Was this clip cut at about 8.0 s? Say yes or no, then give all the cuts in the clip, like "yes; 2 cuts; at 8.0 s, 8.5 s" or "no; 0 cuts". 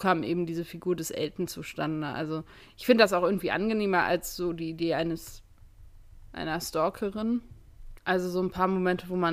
yes; 1 cut; at 8.0 s